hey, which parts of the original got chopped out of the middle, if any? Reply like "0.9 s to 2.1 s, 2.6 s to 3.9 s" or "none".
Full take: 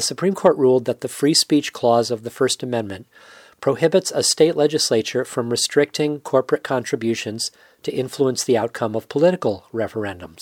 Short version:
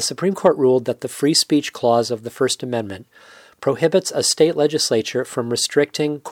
none